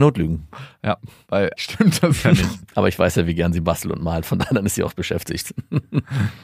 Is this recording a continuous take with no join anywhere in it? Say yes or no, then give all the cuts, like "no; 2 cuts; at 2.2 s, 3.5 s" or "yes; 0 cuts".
no; 1 cut; at 1.6 s